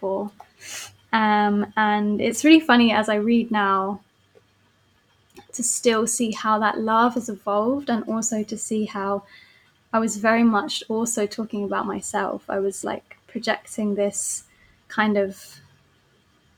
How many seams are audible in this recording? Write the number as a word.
zero